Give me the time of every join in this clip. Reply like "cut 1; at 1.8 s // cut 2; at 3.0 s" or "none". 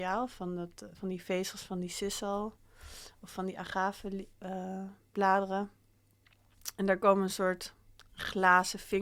none